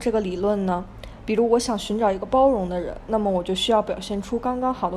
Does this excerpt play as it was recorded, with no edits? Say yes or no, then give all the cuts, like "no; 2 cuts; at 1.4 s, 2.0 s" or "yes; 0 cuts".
yes; 0 cuts